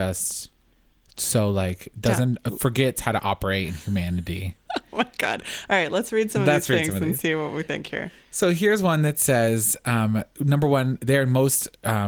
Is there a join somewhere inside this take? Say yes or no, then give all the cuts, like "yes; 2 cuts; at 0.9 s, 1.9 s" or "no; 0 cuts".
no; 0 cuts